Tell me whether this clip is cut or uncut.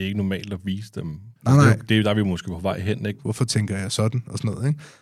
cut